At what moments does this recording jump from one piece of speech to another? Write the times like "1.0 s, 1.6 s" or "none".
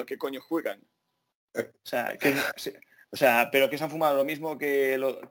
none